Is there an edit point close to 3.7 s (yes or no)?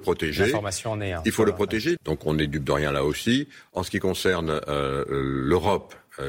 yes